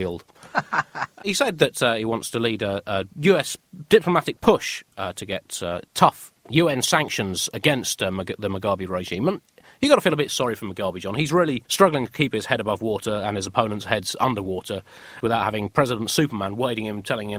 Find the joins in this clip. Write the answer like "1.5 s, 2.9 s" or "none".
11.6 s, 15.2 s